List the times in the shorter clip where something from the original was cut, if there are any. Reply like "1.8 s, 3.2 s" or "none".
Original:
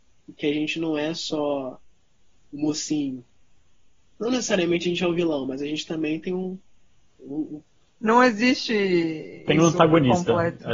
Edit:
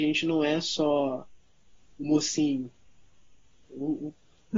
3.6 s

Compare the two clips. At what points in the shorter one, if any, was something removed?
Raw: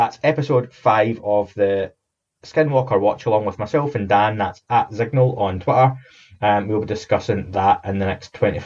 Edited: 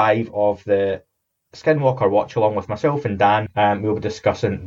3.5 s

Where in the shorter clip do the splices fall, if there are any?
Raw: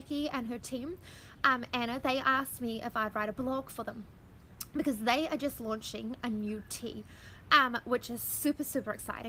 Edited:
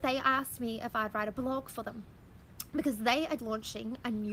3.4 s

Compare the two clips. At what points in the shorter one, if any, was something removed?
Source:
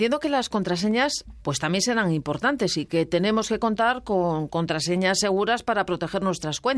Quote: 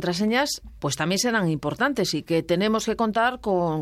none

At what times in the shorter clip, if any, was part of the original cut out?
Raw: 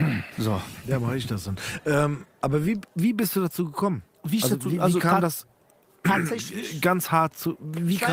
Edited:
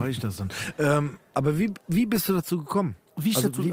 none

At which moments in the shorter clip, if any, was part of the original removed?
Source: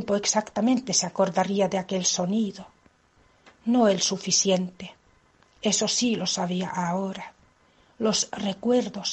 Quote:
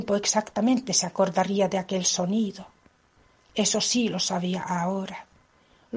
3.4 s

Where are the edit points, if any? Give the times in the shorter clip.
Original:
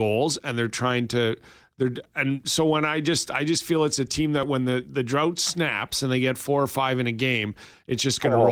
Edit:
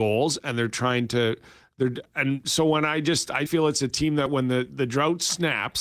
3.5 s

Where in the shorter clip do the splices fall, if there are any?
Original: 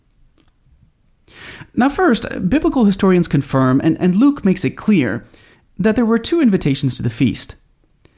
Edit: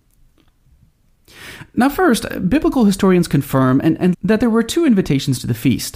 4.1 s

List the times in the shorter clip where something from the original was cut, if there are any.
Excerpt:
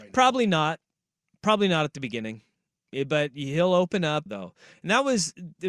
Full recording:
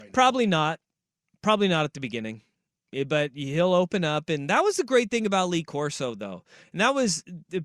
4.3 s

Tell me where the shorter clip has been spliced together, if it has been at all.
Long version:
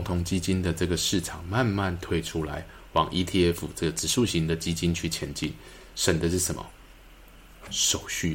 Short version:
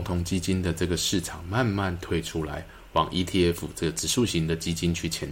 none

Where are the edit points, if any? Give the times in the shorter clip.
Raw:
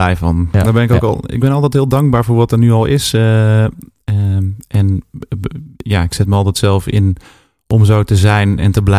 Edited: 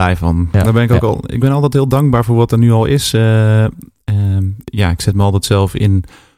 4.6 s

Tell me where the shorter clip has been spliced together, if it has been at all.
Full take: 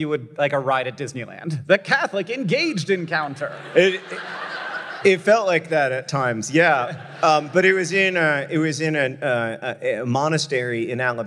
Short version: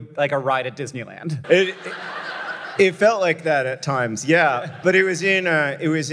1.4 s, 4.8 s

